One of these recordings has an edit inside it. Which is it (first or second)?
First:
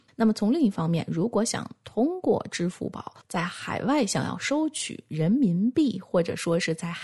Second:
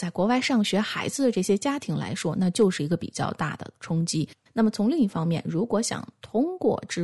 second